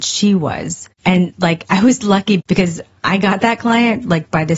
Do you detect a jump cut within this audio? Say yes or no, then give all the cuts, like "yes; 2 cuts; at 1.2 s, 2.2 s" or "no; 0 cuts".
yes; 1 cut; at 1.0 s